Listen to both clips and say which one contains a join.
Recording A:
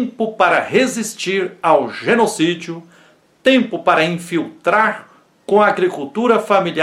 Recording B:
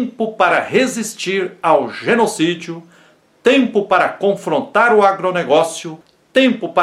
A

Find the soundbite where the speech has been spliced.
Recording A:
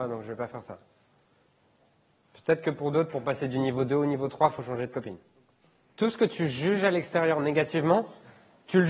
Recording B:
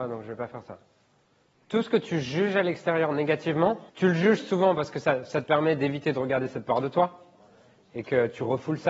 B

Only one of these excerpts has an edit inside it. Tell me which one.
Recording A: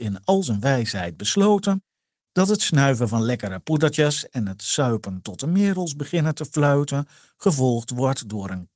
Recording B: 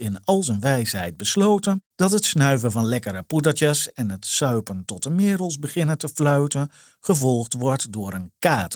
B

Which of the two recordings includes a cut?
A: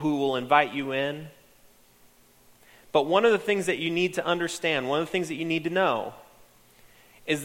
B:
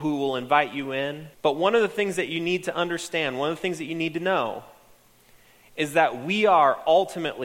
B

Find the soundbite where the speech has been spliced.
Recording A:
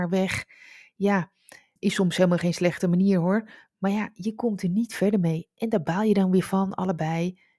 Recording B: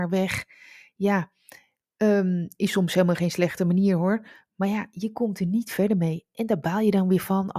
A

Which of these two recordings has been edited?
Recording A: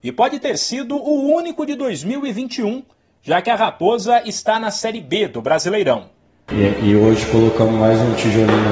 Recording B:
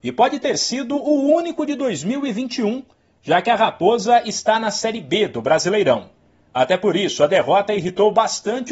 A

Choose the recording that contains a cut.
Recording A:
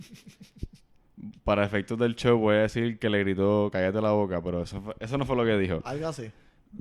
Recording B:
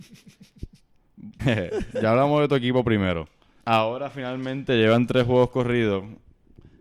B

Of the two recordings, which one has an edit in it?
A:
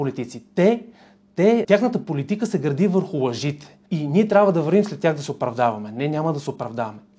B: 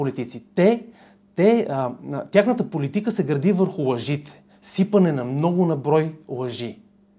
A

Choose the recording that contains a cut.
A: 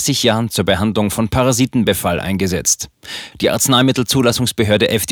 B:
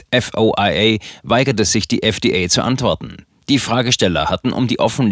A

